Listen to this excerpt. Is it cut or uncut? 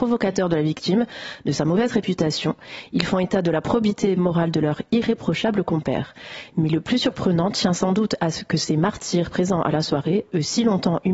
uncut